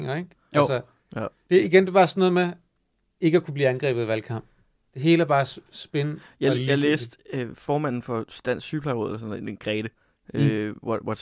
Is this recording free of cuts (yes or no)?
yes